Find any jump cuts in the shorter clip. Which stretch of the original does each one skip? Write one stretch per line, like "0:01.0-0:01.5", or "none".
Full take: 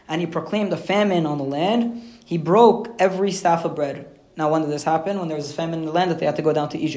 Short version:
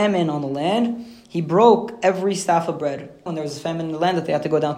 0:04.2-0:05.2